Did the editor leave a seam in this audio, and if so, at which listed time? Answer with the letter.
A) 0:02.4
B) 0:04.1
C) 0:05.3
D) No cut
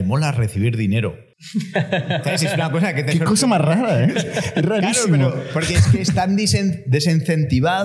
B